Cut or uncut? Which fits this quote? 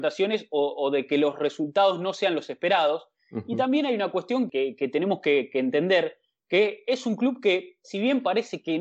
cut